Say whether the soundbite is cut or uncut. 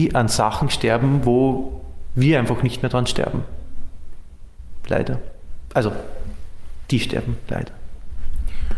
uncut